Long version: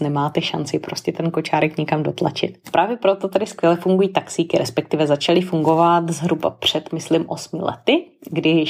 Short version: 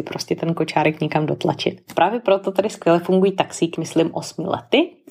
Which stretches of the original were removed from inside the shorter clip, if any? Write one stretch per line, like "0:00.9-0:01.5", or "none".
0:04.5-0:06.9